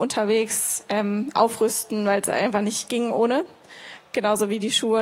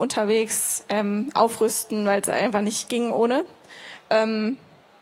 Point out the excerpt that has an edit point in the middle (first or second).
second